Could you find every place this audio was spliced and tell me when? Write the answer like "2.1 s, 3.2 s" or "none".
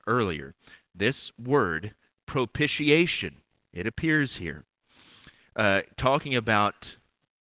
none